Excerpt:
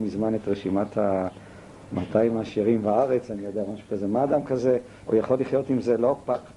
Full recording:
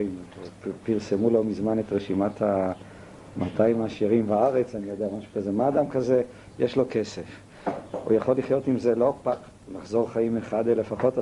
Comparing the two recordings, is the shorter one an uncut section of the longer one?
no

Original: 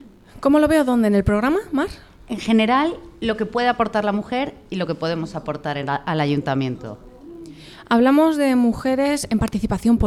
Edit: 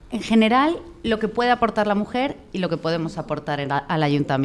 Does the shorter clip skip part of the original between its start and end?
no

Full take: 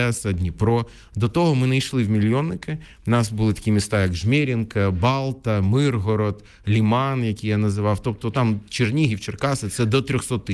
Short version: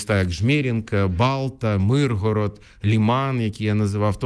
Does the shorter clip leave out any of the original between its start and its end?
no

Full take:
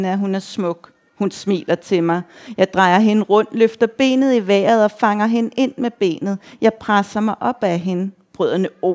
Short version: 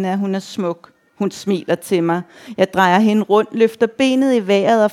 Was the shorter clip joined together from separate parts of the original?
no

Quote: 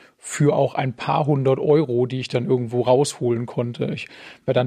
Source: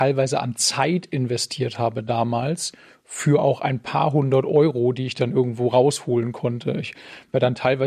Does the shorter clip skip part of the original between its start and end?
no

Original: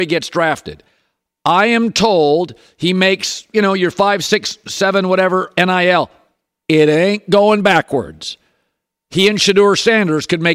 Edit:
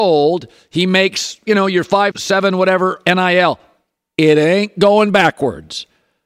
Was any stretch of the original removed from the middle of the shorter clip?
yes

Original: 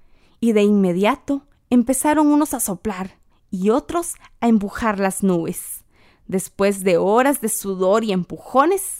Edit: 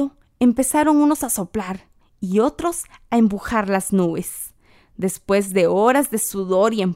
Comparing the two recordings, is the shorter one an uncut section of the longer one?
yes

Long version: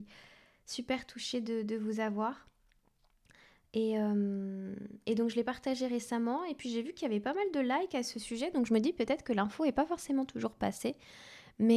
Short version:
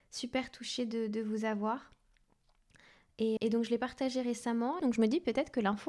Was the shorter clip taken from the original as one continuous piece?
no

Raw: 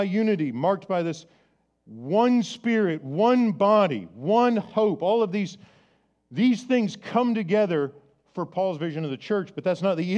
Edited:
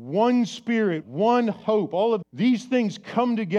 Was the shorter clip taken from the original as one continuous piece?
no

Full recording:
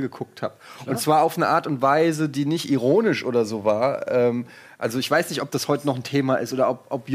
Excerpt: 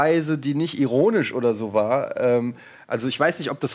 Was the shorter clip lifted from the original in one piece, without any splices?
yes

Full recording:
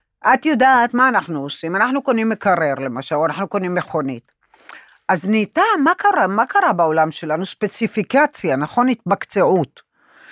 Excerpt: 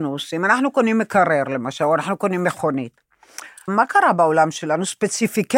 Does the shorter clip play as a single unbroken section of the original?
no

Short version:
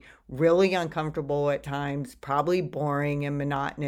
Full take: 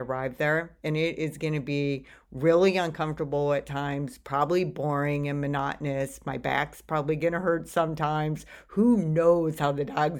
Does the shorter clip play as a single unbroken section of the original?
yes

